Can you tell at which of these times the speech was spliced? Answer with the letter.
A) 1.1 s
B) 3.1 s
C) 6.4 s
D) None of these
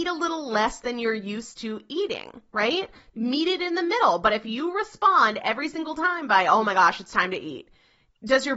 B